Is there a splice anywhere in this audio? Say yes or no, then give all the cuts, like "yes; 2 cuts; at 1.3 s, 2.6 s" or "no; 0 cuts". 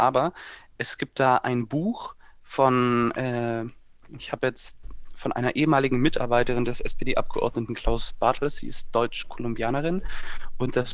no; 0 cuts